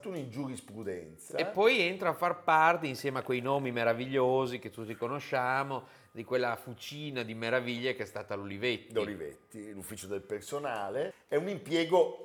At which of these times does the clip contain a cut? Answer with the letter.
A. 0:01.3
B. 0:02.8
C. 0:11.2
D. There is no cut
D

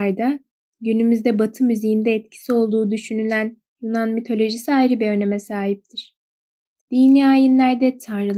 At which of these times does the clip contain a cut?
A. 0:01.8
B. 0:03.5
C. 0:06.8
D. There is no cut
C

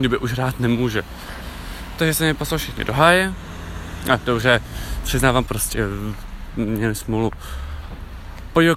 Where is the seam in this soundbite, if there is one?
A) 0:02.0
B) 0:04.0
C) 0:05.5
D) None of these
C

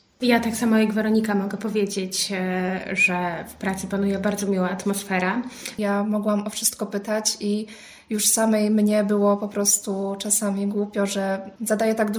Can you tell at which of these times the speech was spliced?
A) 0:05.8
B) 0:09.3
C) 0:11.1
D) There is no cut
A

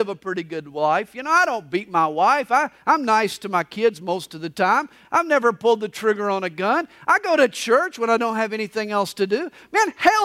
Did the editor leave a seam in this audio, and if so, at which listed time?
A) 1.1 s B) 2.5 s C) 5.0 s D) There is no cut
C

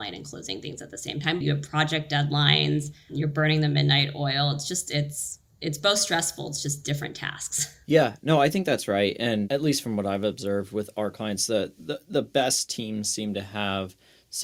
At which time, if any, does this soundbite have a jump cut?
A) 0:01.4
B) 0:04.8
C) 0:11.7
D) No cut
A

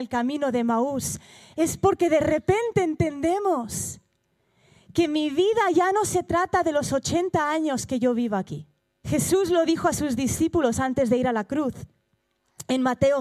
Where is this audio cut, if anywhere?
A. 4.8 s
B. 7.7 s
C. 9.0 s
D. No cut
C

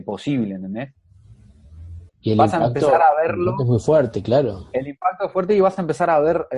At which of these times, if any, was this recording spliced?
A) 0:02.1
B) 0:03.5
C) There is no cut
A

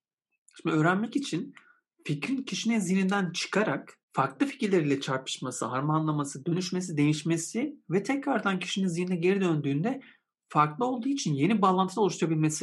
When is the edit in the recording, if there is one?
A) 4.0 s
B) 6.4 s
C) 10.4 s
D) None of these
A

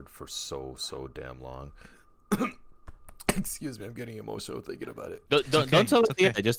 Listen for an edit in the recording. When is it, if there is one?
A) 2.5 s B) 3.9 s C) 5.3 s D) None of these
C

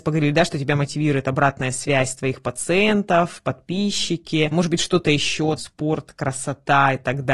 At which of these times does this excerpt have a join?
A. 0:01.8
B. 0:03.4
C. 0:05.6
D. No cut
D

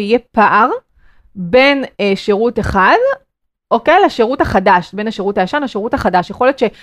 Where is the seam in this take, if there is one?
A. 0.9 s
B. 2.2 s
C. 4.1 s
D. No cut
D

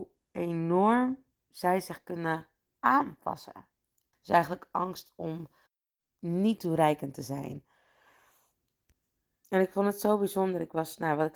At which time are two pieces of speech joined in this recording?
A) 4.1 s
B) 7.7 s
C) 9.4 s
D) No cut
A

